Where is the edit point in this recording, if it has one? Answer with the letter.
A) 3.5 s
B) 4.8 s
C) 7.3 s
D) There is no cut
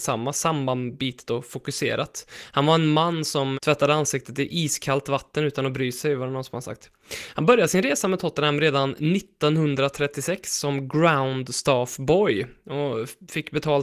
A